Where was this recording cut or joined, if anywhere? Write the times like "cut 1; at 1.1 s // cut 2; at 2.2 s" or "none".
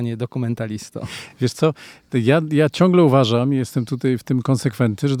none